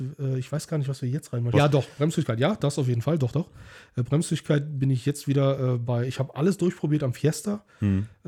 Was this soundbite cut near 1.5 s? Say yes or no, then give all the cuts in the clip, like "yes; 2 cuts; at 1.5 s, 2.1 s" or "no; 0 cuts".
yes; 1 cut; at 1.5 s